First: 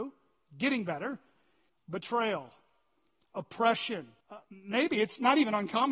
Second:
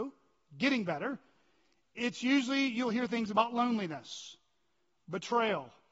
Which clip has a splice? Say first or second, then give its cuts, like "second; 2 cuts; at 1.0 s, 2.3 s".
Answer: first; 2 cuts; at 1.7 s, 4.2 s